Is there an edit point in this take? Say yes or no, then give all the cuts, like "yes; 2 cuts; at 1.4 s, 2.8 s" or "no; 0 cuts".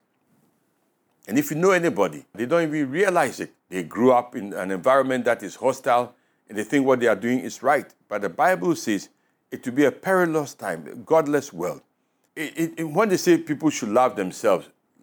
yes; 3 cuts; at 2.3 s, 3.6 s, 12.3 s